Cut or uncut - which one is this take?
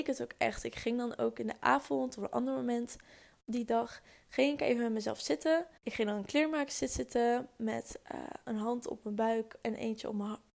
cut